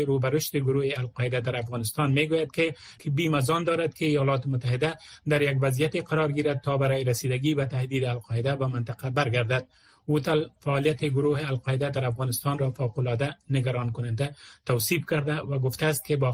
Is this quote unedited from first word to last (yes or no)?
yes